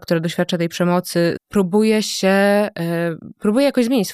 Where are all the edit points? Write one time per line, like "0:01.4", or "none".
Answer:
0:01.4

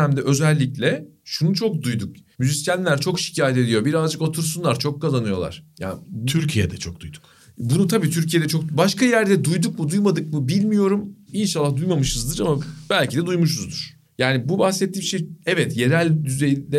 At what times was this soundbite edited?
none

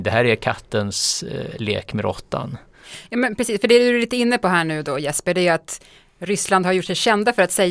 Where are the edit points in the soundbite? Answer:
none

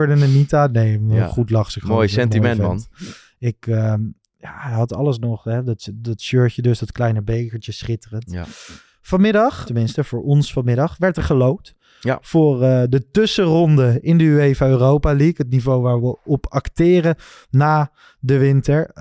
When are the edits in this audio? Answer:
0:09.6

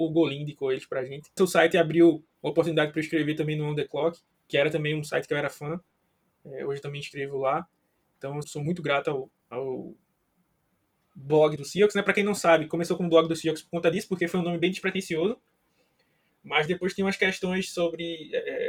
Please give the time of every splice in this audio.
0:01.4
0:08.4
0:11.6

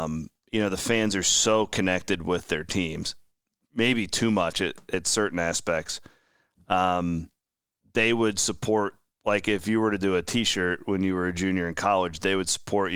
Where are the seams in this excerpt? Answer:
none

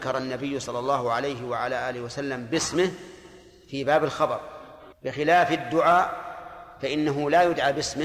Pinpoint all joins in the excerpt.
0:04.9

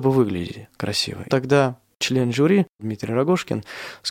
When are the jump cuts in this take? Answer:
0:01.3

